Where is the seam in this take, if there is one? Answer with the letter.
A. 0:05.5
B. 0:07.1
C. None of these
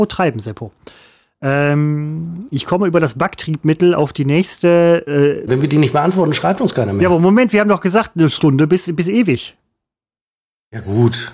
A